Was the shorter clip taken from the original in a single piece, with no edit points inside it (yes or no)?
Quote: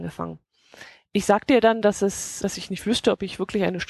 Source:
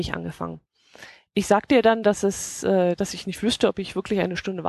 no